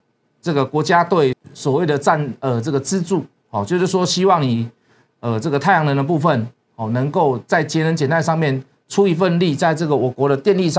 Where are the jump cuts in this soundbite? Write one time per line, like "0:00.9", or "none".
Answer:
0:01.3